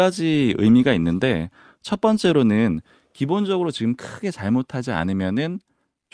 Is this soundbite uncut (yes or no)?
yes